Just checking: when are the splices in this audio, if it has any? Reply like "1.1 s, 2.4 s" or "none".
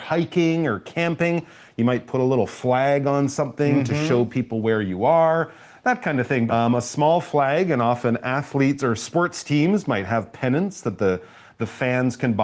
6.5 s

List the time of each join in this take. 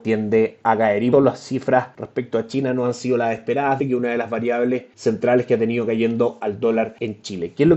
1.1 s, 3.8 s

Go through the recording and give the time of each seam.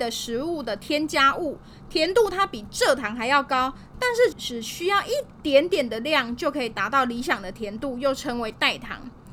4.3 s

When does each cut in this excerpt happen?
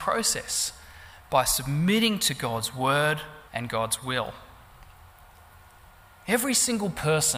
3.5 s

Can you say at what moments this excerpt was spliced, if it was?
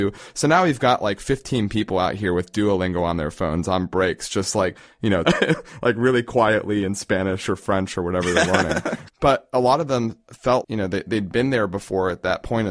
5.2 s, 10.6 s

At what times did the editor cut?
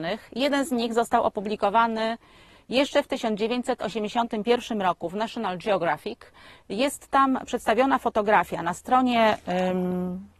none

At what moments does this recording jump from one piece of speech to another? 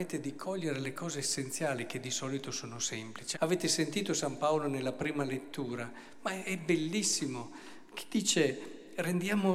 3.3 s

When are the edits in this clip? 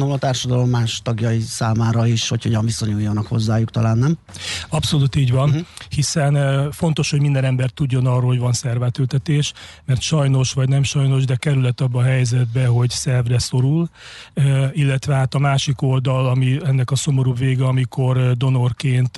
none

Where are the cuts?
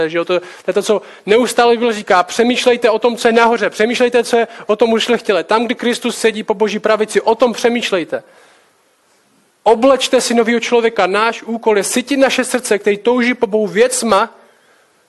none

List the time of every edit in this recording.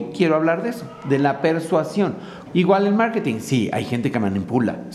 2.5 s

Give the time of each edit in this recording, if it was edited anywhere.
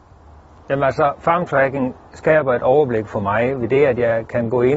none

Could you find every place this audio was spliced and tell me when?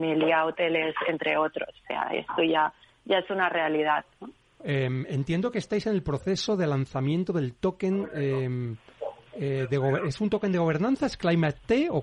4.6 s

